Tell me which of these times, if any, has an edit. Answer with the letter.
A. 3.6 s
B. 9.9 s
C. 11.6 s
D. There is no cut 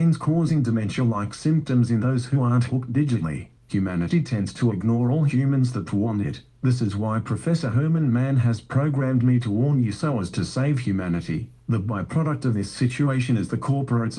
A